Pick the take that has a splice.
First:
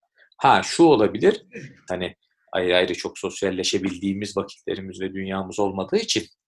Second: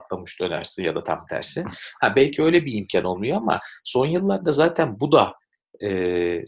first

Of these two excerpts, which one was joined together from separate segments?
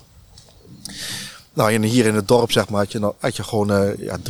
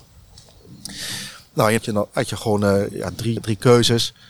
second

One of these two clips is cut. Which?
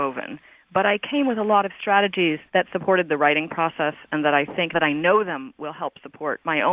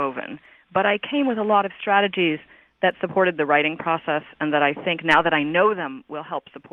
first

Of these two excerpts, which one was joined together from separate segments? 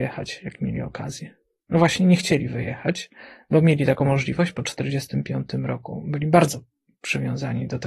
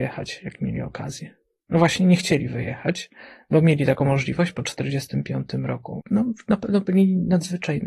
second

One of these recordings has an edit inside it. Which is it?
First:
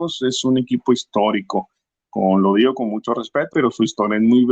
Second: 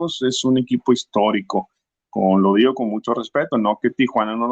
first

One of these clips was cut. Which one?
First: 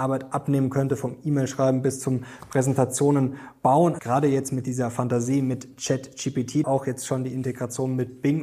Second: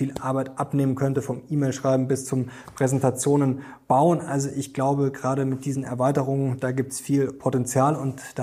first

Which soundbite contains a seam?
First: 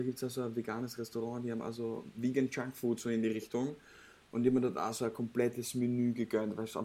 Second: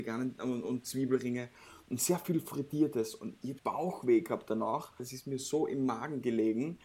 second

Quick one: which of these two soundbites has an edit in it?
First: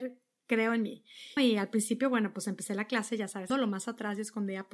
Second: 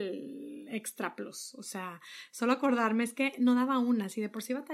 first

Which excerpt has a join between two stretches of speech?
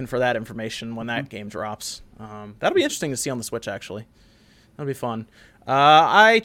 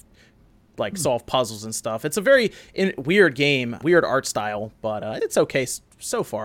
second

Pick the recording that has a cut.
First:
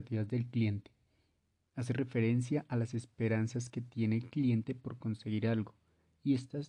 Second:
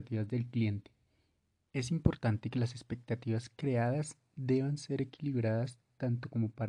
second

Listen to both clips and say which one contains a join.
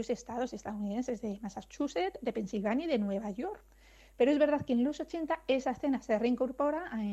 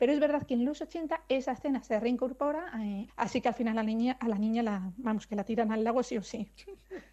second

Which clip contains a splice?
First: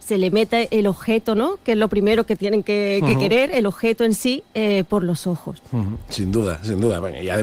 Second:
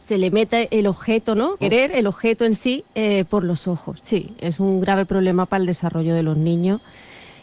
second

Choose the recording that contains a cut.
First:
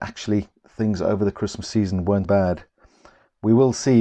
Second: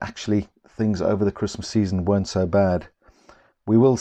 first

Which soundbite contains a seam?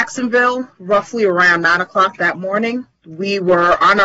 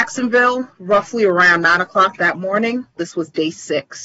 second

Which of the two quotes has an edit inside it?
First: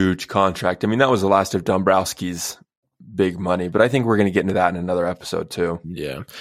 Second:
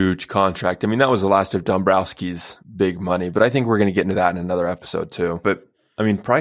second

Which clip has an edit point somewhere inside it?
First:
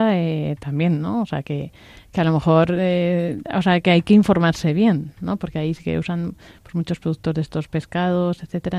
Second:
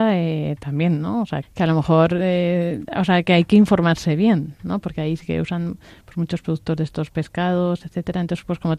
second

